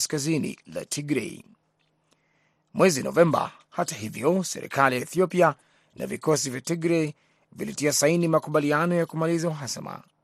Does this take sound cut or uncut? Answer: uncut